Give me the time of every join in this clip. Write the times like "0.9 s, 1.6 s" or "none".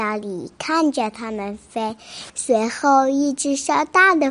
2.3 s